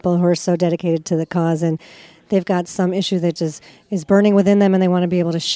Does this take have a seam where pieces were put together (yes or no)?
yes